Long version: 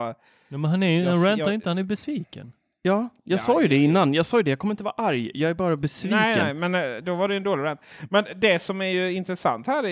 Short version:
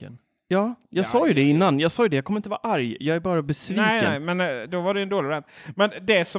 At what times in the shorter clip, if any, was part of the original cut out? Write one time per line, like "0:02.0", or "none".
none